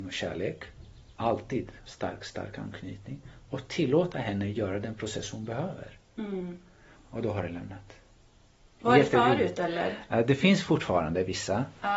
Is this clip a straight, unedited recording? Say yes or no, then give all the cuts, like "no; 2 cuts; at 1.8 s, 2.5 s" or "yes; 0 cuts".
no; 3 cuts; at 1.1 s, 6.9 s, 8.8 s